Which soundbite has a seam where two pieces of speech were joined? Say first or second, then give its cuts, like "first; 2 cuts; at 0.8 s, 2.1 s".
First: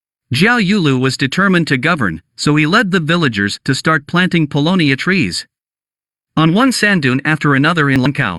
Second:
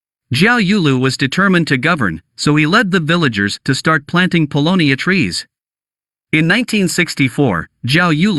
second; 1 cut; at 6.3 s